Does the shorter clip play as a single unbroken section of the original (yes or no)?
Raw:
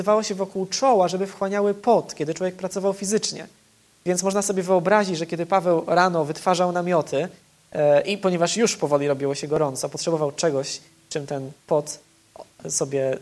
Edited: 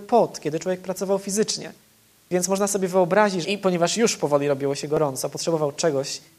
no